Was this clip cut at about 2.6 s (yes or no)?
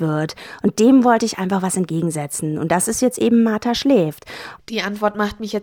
no